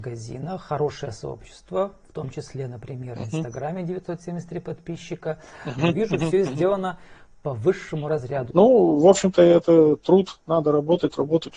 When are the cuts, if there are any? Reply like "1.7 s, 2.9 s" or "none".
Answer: 5.8 s, 8.5 s